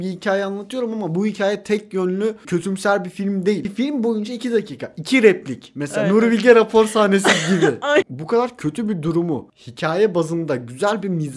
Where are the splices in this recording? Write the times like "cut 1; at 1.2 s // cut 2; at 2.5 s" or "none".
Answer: cut 1; at 8.0 s